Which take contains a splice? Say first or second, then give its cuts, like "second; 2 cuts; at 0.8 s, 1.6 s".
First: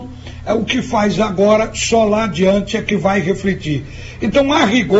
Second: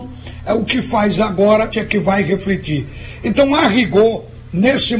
second; 1 cut; at 1.7 s